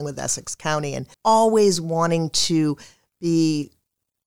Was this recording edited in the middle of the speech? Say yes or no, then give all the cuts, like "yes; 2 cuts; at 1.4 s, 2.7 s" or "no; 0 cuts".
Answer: yes; 1 cut; at 1.1 s